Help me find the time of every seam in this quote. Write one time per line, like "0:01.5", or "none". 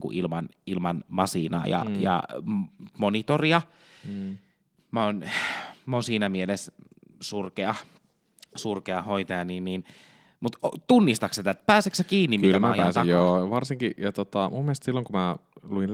none